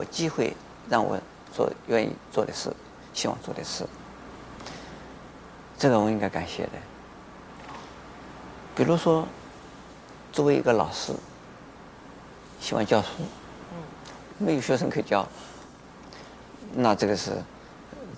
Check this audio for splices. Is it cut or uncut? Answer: cut